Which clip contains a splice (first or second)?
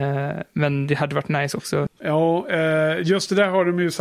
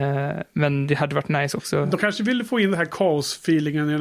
first